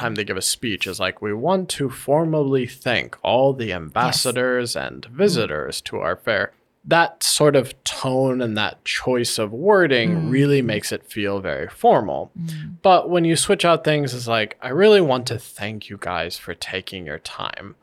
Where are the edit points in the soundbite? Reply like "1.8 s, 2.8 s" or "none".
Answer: none